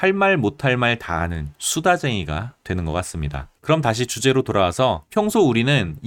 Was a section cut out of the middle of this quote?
yes; 1 cut; at 3.6 s

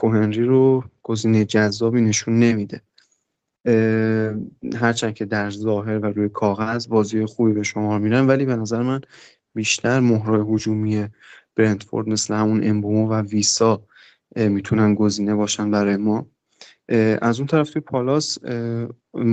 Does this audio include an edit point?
no; 0 cuts

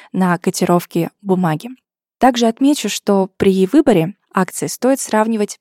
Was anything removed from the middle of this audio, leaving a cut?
no; 0 cuts

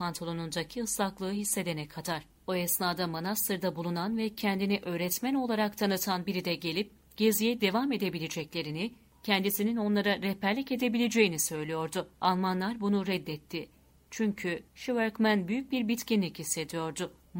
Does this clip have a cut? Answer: yes; 1 cut; at 2.4 s

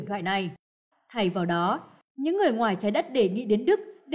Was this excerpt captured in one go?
no; 1 cut; at 0.9 s

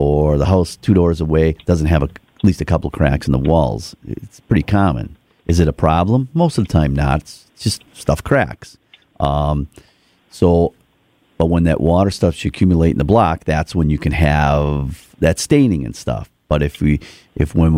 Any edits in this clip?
yes; 1 cut; at 7.9 s

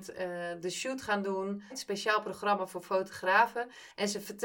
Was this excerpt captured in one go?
no; 1 cut; at 1.7 s

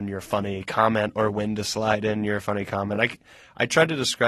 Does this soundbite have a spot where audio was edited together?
no; 0 cuts

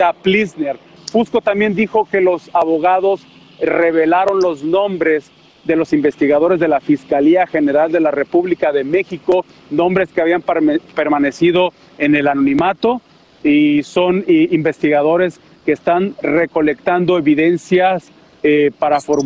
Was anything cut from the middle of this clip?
yes; 1 cut; at 1.0 s

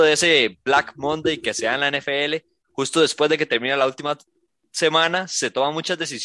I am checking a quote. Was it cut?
no; 0 cuts

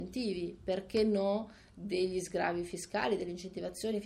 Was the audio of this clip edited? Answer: no; 0 cuts

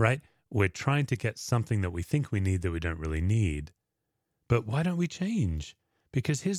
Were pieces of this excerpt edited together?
no; 0 cuts

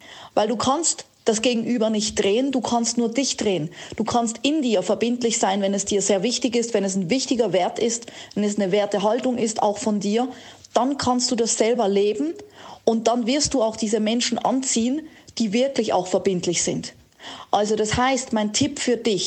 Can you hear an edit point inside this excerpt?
no; 0 cuts

